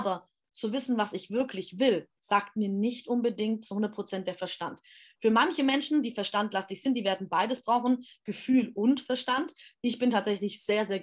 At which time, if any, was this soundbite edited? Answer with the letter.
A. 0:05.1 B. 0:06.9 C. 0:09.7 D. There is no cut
D